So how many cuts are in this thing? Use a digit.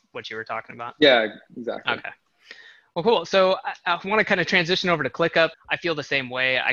2